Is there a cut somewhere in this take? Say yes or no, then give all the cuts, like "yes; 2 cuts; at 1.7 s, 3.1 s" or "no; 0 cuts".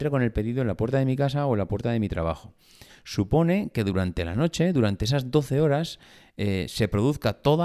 yes; 1 cut; at 2.9 s